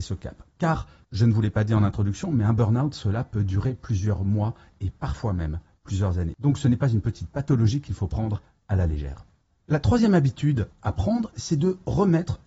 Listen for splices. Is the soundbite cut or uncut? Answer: uncut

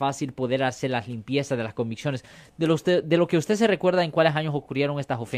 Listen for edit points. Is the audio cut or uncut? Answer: uncut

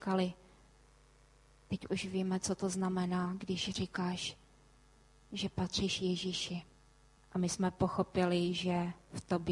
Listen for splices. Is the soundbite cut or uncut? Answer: cut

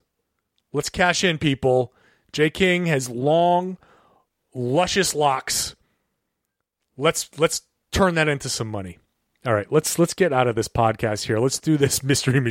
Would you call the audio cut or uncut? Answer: uncut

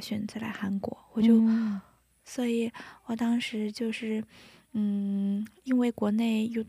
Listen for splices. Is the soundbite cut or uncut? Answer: cut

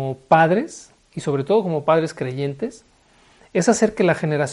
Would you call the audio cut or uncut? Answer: uncut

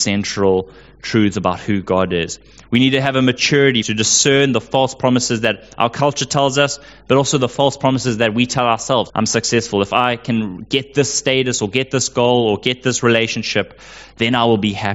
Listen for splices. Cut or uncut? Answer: cut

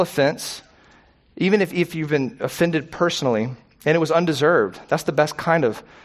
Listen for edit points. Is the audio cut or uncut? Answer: uncut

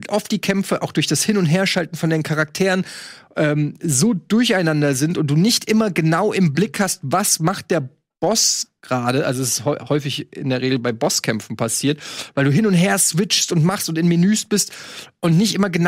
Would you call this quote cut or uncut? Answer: uncut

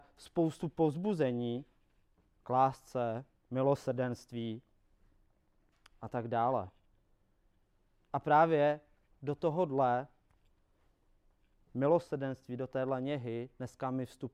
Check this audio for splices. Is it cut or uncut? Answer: uncut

